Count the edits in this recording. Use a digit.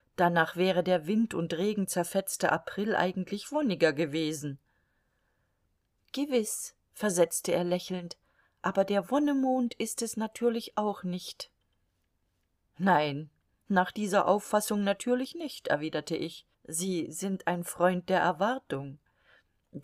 1